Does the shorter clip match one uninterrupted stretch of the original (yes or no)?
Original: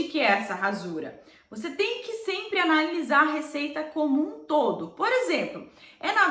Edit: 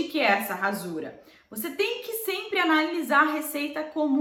yes